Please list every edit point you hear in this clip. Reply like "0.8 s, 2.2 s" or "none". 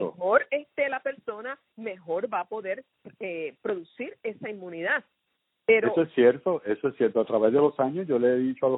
none